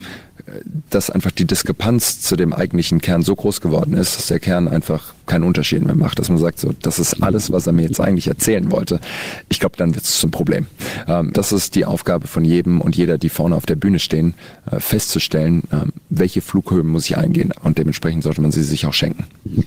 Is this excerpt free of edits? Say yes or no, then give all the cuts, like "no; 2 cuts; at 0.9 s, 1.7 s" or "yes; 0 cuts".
no; 2 cuts; at 11.3 s, 17.5 s